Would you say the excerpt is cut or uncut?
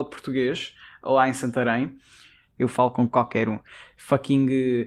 cut